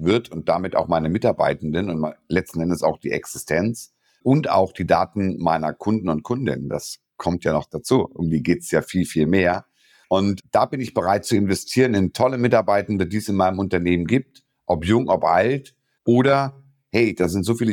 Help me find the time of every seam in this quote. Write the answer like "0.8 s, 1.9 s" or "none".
none